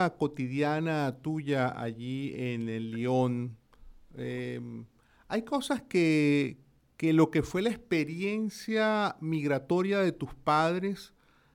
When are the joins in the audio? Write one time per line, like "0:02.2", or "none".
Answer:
none